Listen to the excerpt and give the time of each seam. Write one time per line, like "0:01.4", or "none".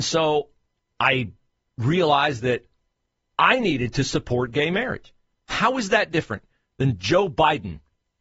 0:05.4